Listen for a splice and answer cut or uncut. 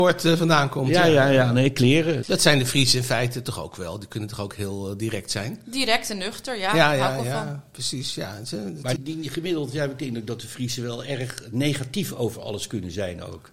cut